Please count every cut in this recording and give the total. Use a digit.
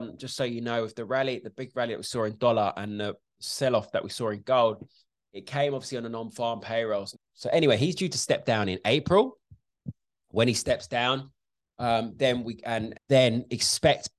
2